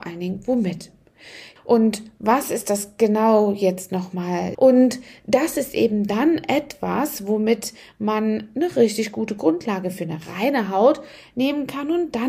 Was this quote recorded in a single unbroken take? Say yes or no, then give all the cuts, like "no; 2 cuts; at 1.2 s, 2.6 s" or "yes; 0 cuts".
no; 2 cuts; at 1.6 s, 4.5 s